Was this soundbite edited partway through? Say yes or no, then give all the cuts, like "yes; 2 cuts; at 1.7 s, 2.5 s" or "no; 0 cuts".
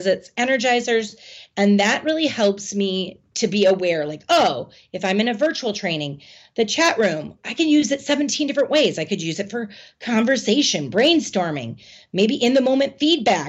yes; 1 cut; at 7.4 s